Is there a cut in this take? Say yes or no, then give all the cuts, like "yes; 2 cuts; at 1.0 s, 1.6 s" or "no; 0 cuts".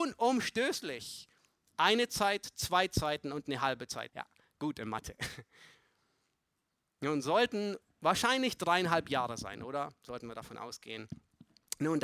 yes; 1 cut; at 4.1 s